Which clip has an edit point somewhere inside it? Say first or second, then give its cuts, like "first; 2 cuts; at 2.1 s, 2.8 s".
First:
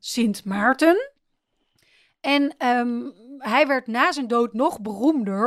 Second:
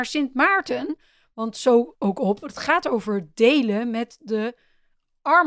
second; 1 cut; at 1.9 s